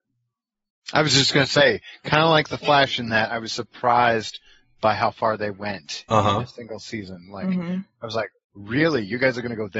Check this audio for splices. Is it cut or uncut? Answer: uncut